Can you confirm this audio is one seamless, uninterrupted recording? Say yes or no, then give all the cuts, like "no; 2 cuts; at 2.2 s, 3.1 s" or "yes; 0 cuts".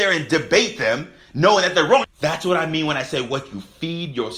no; 1 cut; at 2.0 s